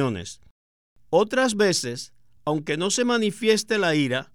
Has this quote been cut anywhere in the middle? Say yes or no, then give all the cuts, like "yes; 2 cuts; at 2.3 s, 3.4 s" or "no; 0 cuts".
no; 0 cuts